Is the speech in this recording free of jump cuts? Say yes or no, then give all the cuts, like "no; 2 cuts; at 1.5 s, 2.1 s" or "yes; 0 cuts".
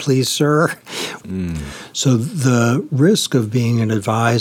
no; 1 cut; at 1.2 s